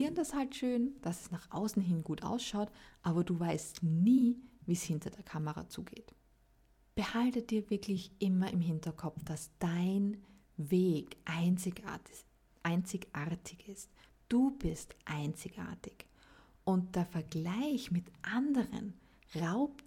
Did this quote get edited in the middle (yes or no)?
no